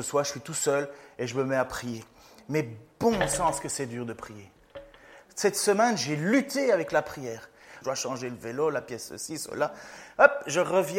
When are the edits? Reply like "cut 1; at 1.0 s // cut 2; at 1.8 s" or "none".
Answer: cut 1; at 7.8 s

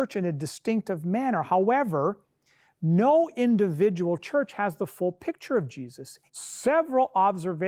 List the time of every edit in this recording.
cut 1; at 6.3 s

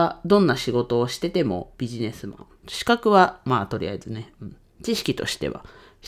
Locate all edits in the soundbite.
cut 1; at 2.6 s

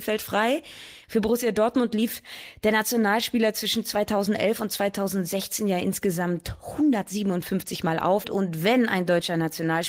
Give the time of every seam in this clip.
cut 1; at 1.0 s // cut 2; at 8.2 s

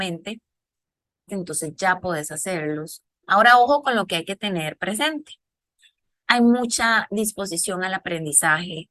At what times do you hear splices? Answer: cut 1; at 1.3 s // cut 2; at 3.2 s // cut 3; at 6.1 s

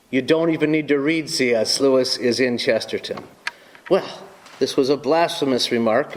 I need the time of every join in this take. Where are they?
cut 1; at 1.8 s

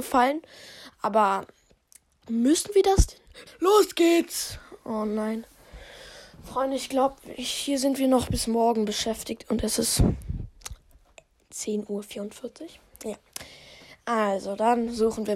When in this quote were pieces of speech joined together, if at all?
cut 1; at 3.5 s

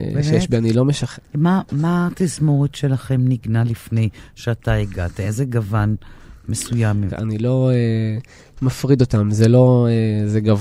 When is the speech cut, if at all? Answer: cut 1; at 1.2 s // cut 2; at 7.1 s

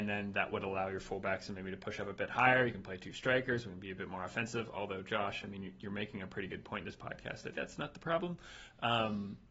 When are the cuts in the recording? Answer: cut 1; at 7.5 s

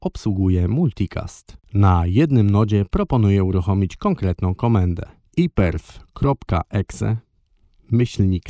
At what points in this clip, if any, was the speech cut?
cut 1; at 5.3 s

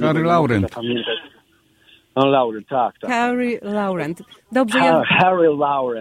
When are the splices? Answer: none

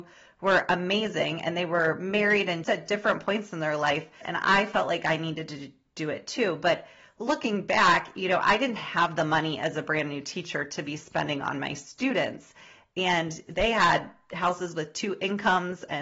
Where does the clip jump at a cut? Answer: cut 1; at 2.6 s // cut 2; at 4.2 s

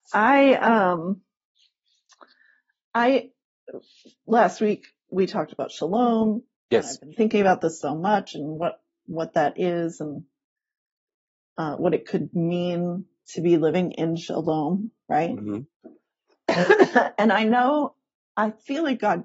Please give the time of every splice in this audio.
none

